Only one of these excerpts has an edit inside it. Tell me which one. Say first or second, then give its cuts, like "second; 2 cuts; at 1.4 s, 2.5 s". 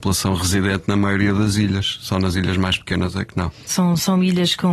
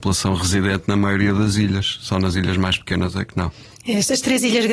first; 1 cut; at 3.7 s